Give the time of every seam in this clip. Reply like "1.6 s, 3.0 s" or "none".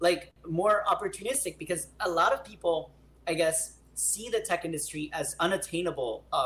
none